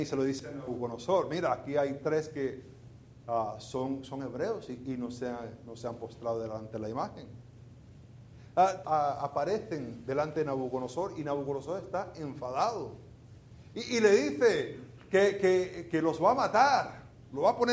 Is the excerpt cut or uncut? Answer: cut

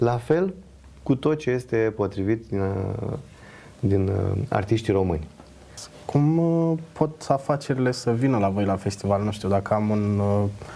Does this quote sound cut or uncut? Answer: uncut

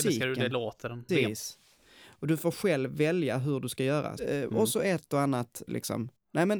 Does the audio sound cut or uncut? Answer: cut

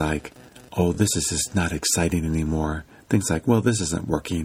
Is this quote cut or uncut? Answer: uncut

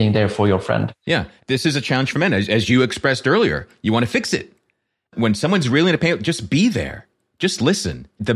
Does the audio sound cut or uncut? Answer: uncut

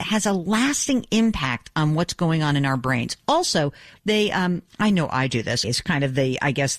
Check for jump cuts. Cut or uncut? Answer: cut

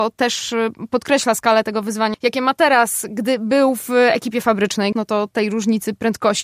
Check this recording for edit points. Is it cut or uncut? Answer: cut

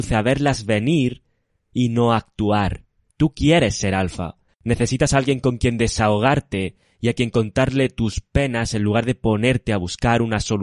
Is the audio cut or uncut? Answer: cut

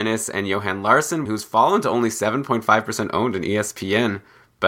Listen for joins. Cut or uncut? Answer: cut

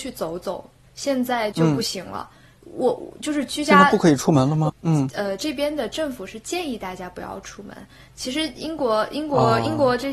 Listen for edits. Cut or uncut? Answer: cut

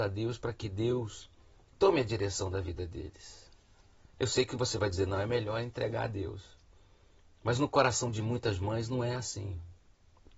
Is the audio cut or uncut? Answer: uncut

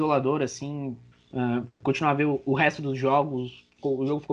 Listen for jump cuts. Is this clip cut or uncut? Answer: cut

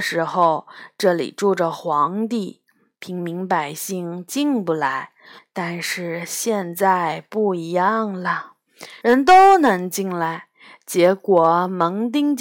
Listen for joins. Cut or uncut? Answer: cut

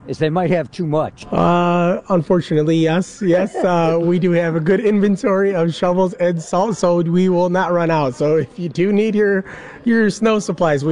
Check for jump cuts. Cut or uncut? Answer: uncut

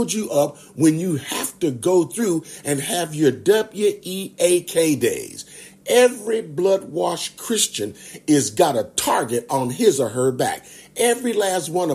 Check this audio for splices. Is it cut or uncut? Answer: uncut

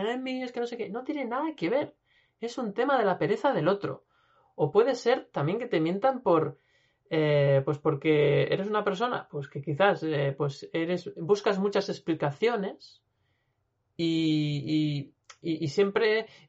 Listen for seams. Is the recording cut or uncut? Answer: uncut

